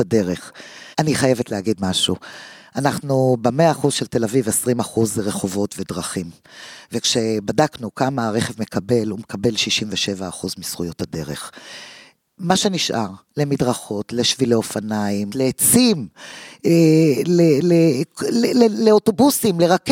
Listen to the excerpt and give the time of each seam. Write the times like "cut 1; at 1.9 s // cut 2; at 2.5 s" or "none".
cut 1; at 0.9 s // cut 2; at 15.3 s